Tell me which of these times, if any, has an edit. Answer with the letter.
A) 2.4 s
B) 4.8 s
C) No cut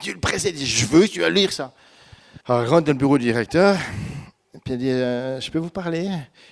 A